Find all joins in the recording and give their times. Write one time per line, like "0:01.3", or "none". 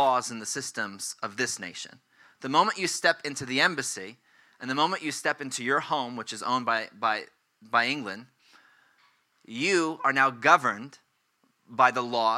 none